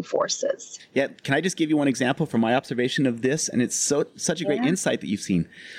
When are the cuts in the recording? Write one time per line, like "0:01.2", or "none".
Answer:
none